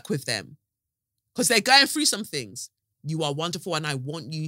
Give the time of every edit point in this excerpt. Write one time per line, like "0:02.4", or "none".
0:02.8